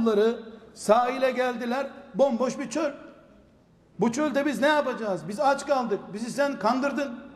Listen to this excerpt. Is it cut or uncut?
uncut